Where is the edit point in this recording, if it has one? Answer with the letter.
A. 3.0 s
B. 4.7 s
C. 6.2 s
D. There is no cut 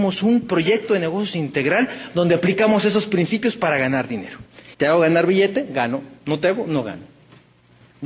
B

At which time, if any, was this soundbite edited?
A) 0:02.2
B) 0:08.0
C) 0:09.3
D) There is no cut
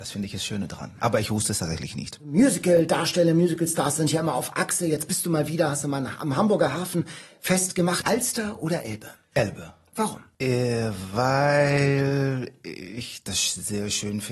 B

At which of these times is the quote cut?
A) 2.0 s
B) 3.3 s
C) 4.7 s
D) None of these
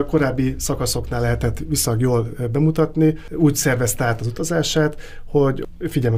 D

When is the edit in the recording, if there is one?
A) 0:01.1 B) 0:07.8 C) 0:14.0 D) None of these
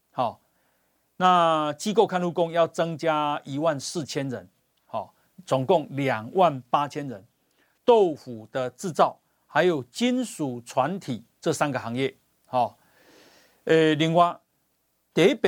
B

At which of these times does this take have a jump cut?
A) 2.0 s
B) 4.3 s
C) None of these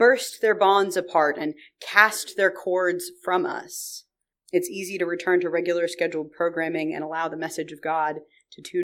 B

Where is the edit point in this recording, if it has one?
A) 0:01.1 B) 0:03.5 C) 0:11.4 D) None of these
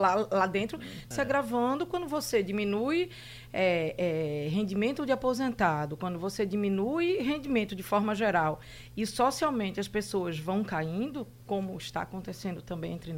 A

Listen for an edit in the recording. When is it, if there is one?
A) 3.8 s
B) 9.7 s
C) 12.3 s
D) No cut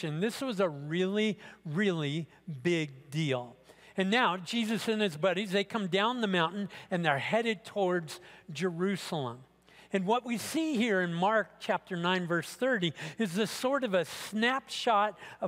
D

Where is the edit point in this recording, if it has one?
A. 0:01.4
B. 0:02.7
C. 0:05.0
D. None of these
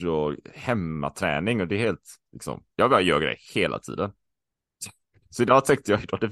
B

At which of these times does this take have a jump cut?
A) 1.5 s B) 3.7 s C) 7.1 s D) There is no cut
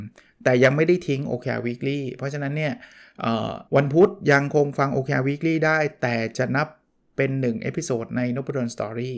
B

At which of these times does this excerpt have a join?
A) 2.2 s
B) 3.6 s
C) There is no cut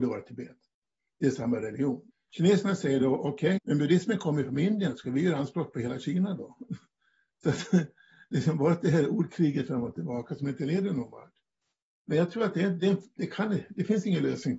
B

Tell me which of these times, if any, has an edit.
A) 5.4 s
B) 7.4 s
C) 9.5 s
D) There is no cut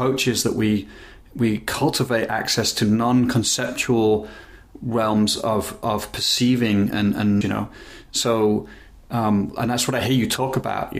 B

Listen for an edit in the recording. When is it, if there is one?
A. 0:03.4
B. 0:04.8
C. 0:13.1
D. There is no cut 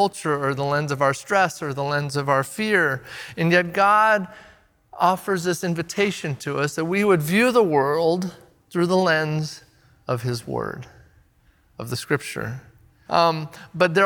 C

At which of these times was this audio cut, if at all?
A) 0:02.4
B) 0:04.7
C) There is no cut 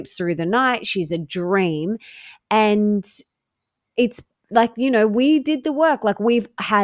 C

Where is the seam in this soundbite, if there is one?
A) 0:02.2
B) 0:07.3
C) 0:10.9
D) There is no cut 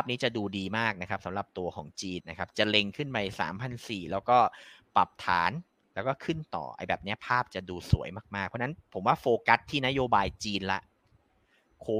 A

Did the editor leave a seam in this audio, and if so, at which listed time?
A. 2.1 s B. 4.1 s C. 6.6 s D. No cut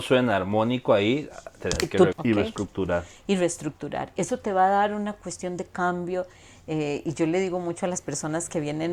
A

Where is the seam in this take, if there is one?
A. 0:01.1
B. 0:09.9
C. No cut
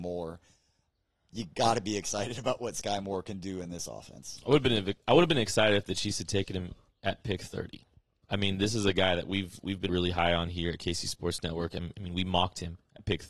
B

